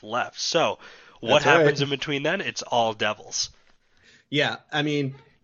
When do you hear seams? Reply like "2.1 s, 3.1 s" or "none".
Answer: none